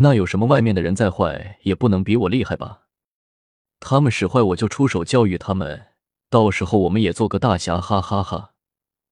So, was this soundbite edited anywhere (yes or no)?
no